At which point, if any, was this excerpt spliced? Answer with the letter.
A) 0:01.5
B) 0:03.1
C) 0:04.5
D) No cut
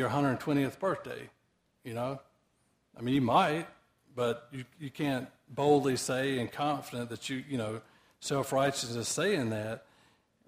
D